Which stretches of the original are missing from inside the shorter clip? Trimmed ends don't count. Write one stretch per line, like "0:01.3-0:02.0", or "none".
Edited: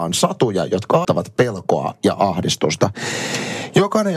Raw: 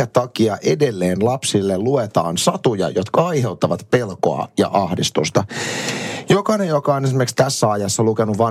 0:03.3-0:03.6